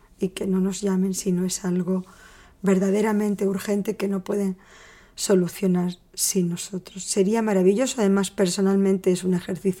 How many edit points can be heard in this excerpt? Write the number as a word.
zero